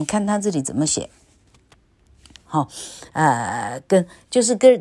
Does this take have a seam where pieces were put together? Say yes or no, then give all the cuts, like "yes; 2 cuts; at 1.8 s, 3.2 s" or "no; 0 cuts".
yes; 1 cut; at 2.4 s